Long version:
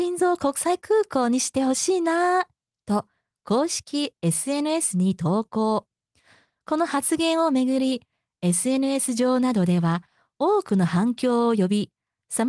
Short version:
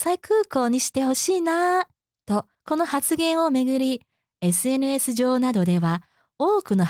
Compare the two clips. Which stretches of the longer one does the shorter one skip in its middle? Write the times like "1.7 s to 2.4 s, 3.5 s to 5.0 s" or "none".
3.1 s to 6.6 s

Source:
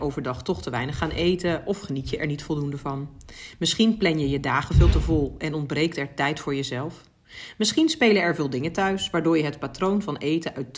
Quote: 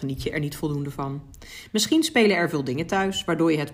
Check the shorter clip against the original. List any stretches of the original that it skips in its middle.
3.6 s to 7.6 s

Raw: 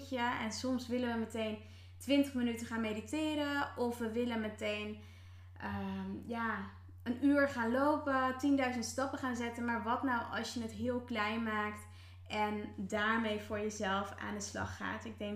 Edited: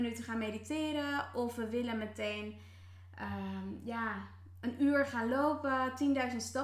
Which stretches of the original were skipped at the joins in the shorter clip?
none

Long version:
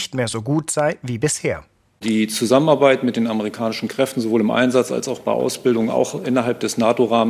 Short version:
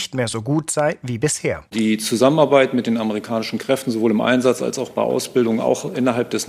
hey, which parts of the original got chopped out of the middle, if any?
1.7 s to 2.0 s

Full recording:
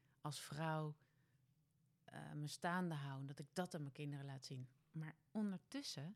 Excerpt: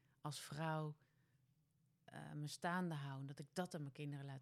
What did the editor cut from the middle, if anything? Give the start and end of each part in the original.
none

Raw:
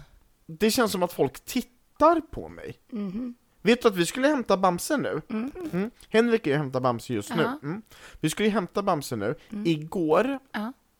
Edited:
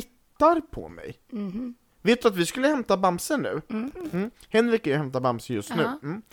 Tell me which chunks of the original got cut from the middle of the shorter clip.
none

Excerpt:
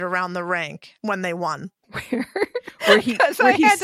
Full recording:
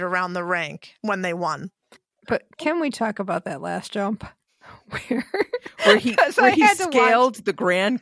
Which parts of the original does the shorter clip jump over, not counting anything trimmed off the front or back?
1.8 s to 4.8 s

